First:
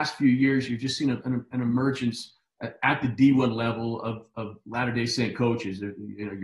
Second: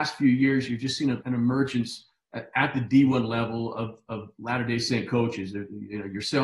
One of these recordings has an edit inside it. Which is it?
second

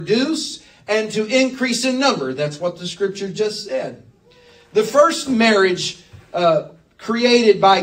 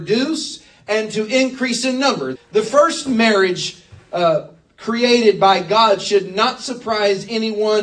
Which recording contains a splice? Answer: second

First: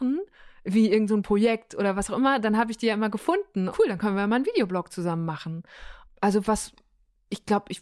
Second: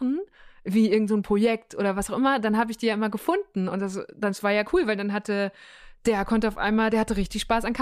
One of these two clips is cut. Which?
first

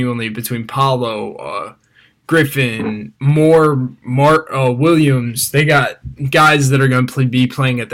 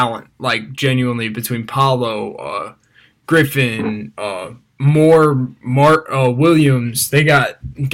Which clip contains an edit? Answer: first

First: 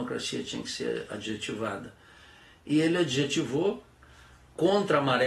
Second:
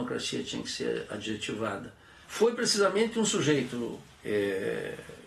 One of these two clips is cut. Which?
second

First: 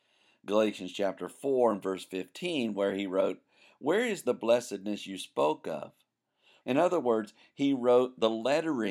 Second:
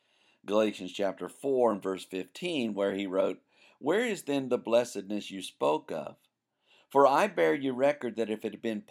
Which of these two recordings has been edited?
first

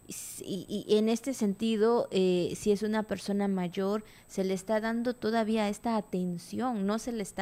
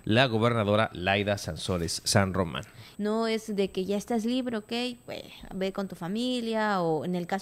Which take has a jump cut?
second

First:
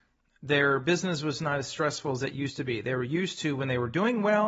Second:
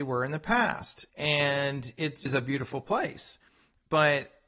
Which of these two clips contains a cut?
second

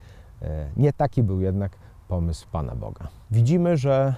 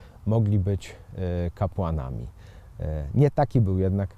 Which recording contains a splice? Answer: first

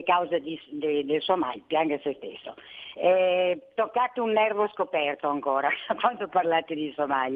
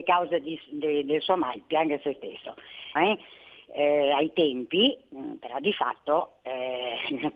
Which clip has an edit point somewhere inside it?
second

